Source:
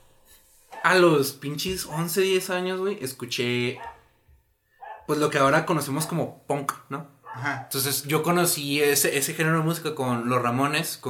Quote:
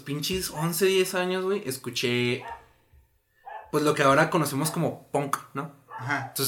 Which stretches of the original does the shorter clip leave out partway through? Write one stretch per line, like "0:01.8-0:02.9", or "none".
none